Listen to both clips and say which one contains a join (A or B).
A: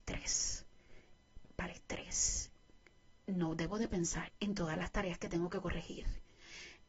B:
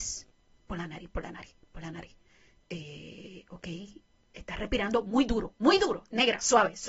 A